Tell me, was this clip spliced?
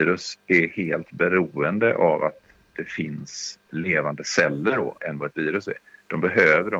yes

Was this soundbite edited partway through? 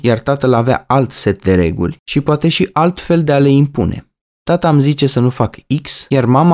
no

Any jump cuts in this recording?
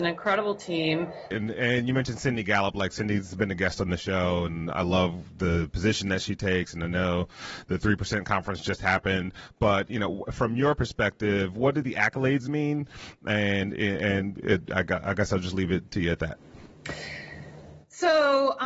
yes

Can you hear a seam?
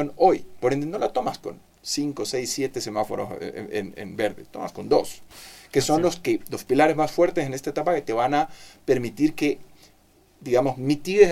no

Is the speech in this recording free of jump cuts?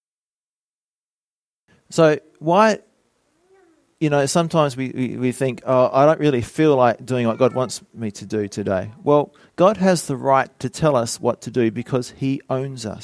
yes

